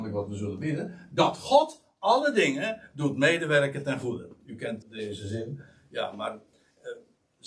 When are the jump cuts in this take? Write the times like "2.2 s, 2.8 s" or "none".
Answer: 4.8 s

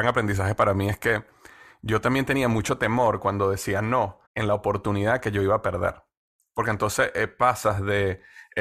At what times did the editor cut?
4.2 s

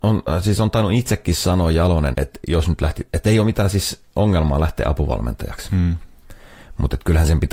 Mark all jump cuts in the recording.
2.1 s

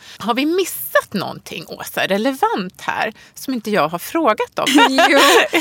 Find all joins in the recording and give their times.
4.7 s

